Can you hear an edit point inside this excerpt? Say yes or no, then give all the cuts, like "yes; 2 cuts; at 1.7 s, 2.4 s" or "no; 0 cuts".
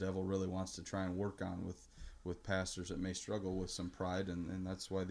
no; 0 cuts